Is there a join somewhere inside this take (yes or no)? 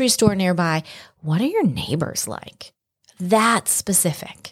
no